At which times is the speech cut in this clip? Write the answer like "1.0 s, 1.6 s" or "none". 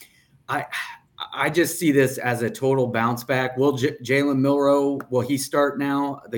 none

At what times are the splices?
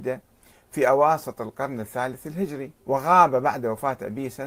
2.8 s

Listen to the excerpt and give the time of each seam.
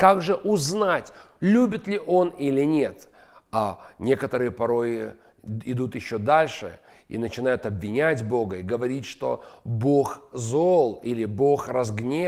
none

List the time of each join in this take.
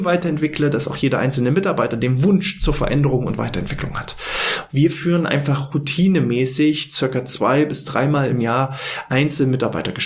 4.7 s

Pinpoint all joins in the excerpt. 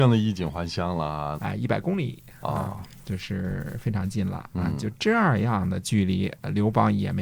1.4 s

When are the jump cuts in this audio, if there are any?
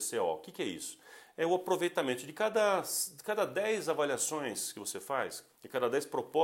5.5 s

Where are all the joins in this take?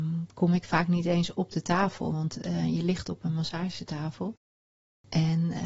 none

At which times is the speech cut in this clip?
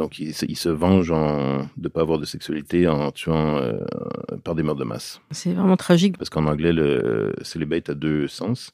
6.1 s

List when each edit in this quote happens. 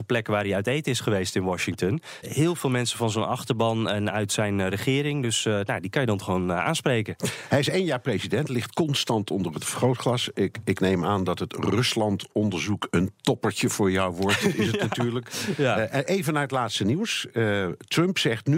2.2 s

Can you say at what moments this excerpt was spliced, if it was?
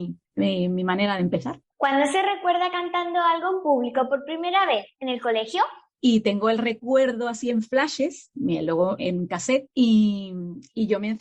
5.9 s, 9.0 s

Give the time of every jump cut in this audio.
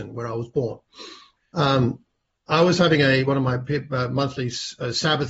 1.4 s

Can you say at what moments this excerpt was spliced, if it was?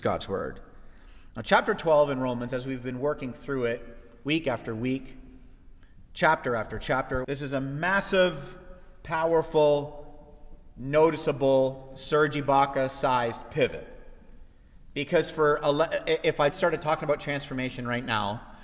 7.2 s, 16.5 s

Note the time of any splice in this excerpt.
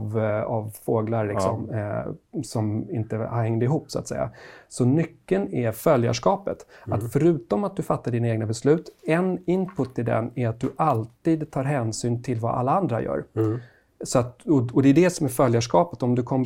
2.4 s

